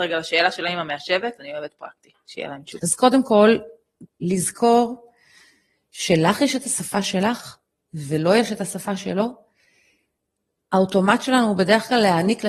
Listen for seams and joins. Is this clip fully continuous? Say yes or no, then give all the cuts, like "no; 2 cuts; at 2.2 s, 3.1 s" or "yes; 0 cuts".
no; 2 cuts; at 2.8 s, 4.1 s